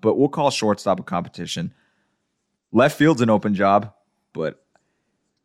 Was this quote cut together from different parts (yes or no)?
yes